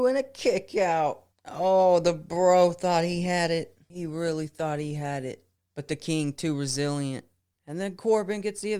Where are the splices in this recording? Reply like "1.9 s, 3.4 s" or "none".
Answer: none

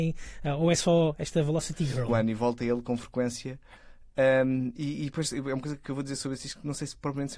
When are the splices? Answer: 2.1 s

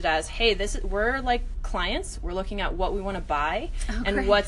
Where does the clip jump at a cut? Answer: none

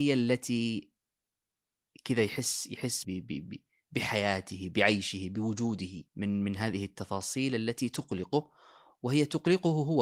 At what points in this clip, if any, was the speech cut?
3.0 s, 6.1 s

